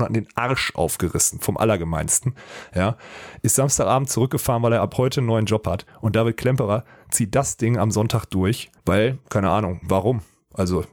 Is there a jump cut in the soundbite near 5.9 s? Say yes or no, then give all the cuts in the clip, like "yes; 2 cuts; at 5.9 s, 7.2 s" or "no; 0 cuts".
no; 2 cuts; at 8.8 s, 9.8 s